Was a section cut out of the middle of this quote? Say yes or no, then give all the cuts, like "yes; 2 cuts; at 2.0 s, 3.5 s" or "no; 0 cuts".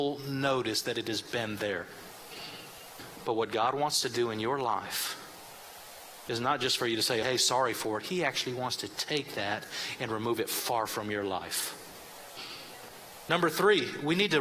yes; 2 cuts; at 7.2 s, 13.2 s